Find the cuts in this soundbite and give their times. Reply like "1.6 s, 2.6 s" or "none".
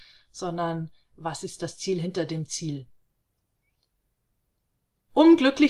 none